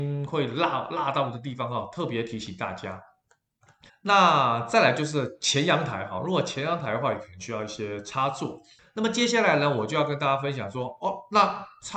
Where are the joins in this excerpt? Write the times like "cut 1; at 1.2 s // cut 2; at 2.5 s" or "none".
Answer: cut 1; at 3.9 s // cut 2; at 8.8 s